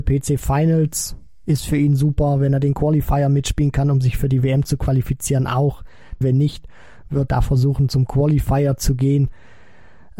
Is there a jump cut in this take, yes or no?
yes